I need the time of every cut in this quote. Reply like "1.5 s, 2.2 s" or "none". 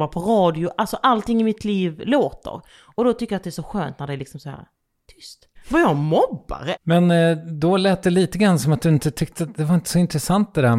5.6 s, 6.8 s